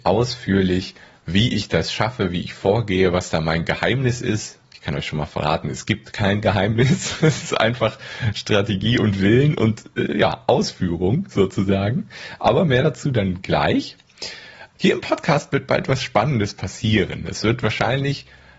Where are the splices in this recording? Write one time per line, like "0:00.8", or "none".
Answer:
0:14.8

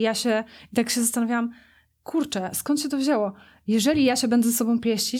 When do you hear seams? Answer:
none

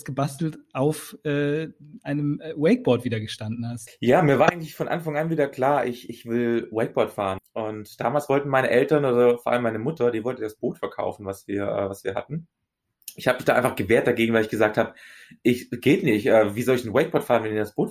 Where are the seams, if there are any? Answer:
0:03.9
0:07.4

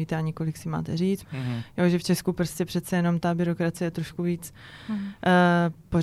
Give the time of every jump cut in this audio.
0:01.2

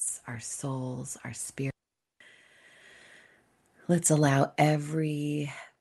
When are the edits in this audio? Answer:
none

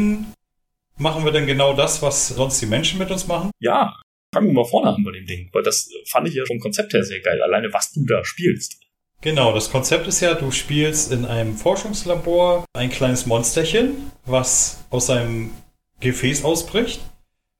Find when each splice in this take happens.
0:03.5
0:06.5

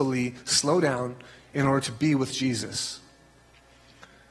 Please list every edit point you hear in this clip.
none

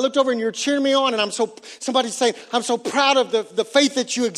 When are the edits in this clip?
none

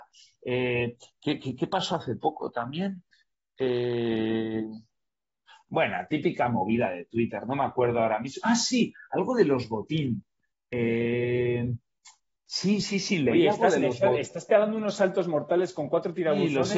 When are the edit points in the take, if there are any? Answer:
none

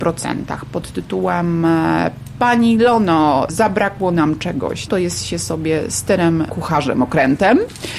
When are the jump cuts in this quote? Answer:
0:04.9
0:06.5

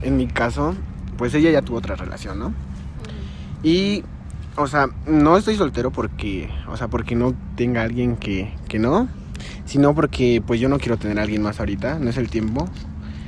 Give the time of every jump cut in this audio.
none

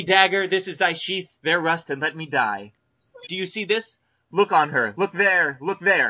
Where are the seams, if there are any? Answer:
0:03.2
0:04.9

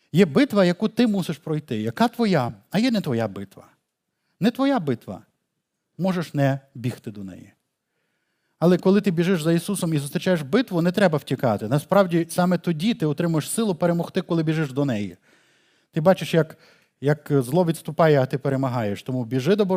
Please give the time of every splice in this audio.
none

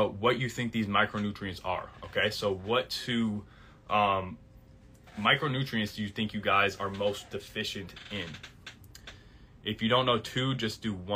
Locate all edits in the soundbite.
0:02.3

